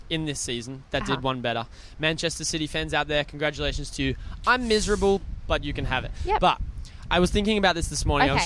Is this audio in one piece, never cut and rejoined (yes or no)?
yes